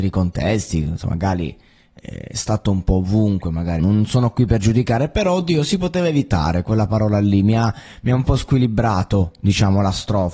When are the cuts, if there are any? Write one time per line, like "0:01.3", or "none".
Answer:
0:03.8